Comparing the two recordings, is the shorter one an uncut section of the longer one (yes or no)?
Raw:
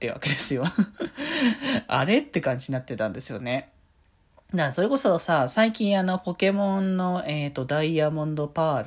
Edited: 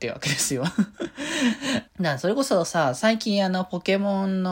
no